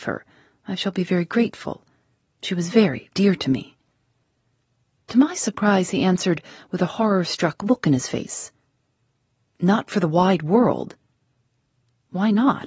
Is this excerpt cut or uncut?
cut